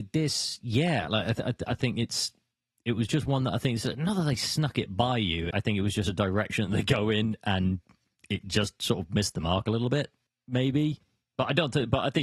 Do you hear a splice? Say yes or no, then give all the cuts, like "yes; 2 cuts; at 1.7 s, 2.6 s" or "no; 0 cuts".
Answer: yes; 1 cut; at 5.5 s